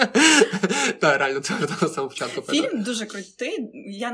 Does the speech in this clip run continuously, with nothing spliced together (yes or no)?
yes